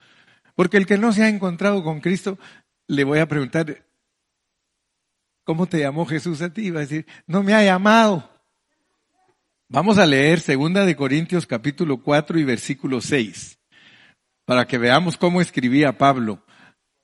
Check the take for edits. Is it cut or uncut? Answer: cut